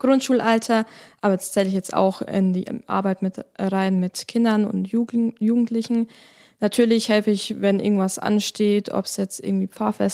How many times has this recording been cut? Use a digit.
0